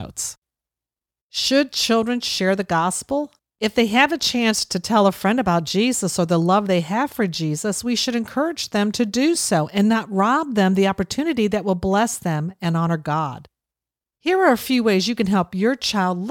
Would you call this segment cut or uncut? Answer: cut